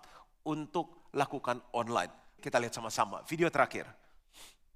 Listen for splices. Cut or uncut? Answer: cut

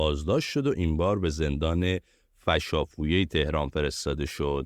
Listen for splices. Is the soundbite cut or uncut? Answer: uncut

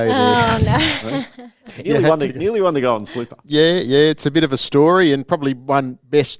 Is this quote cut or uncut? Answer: uncut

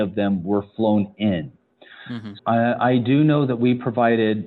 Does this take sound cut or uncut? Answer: cut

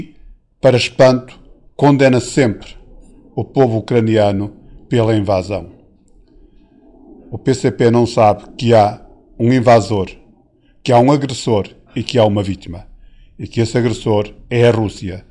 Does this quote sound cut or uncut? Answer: uncut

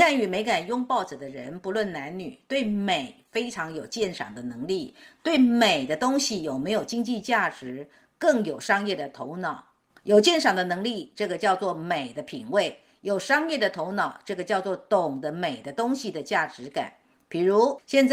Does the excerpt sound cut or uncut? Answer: uncut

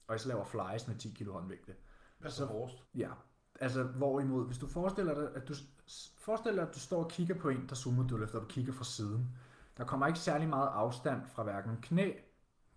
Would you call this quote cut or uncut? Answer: cut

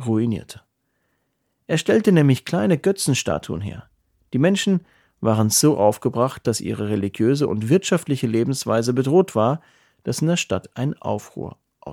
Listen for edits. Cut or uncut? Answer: uncut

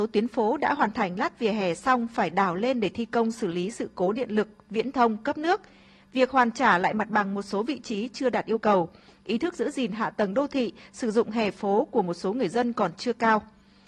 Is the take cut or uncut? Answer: uncut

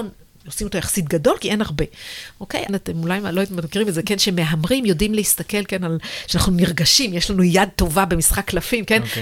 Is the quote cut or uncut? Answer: cut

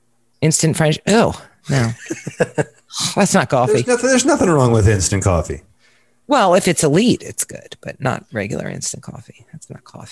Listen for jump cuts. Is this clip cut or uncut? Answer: uncut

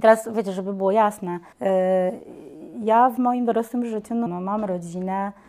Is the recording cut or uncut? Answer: cut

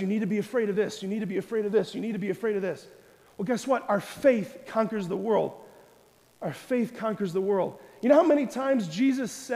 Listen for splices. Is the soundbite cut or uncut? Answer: cut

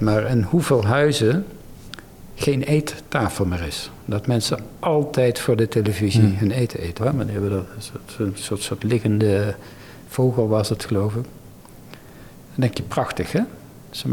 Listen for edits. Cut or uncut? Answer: cut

